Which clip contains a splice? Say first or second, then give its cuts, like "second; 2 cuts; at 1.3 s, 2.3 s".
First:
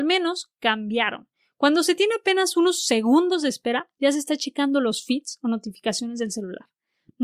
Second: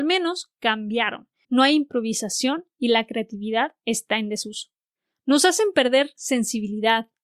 second; 1 cut; at 1.4 s